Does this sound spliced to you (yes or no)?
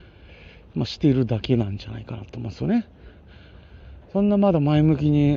yes